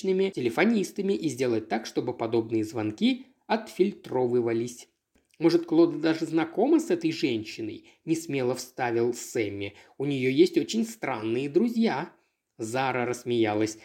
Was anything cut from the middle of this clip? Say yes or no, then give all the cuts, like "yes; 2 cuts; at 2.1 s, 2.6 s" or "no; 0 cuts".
no; 0 cuts